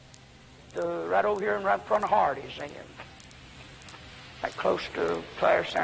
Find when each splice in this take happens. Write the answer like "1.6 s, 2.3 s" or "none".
none